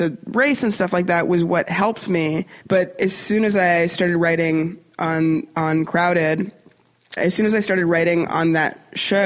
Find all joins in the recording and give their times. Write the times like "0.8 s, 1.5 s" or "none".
2.6 s, 7.2 s